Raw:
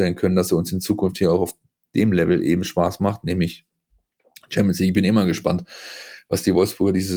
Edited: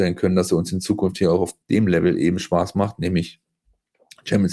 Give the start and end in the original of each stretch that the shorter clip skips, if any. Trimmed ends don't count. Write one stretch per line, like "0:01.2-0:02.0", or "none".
0:01.6-0:01.9